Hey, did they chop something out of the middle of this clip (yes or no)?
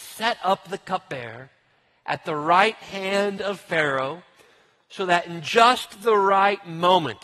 no